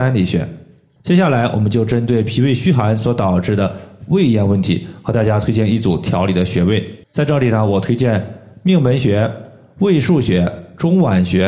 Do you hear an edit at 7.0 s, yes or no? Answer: yes